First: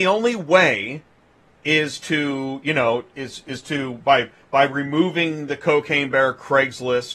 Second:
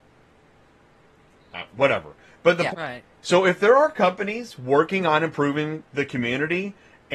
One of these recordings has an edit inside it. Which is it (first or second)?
second